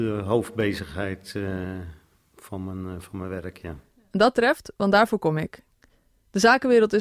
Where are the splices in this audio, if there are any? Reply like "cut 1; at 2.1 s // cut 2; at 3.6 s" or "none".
none